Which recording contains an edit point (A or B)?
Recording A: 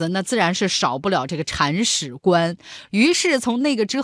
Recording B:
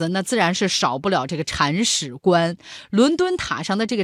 A